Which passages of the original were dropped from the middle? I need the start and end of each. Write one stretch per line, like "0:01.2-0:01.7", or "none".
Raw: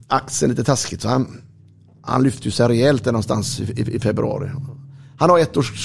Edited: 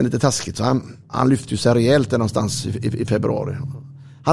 0:01.5-0:01.9